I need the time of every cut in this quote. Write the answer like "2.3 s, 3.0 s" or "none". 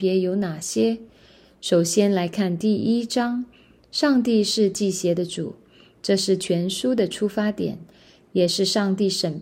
none